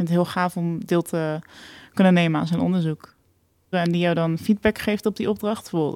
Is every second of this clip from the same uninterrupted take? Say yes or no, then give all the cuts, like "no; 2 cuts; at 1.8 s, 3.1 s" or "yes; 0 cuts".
no; 1 cut; at 3.7 s